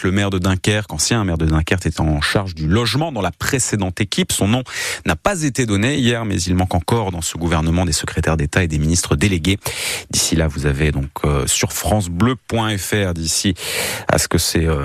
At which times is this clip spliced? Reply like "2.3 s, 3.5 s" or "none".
none